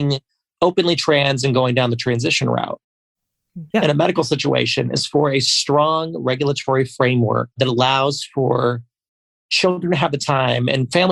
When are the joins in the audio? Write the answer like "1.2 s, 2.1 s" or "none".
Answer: 3.7 s, 7.5 s